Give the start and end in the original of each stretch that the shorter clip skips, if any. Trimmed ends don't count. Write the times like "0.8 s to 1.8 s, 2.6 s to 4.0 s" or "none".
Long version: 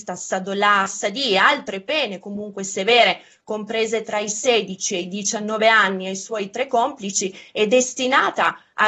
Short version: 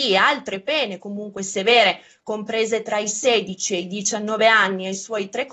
none

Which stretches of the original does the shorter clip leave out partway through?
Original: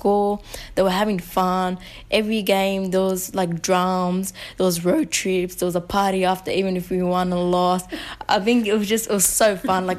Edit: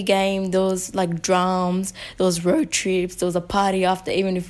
none

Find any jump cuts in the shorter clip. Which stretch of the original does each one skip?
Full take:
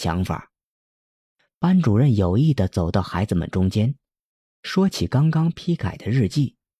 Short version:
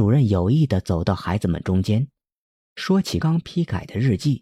5.1 s to 5.3 s

